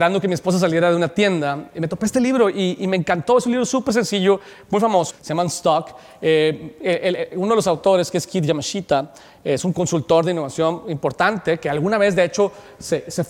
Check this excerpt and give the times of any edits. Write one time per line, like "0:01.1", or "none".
0:05.1